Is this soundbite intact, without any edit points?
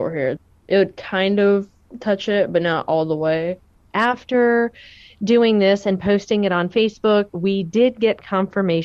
yes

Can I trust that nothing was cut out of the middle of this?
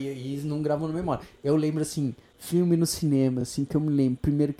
yes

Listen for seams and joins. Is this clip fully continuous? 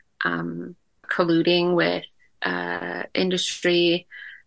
no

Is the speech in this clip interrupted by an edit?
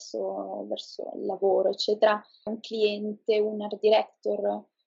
yes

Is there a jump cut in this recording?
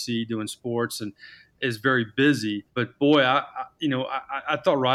yes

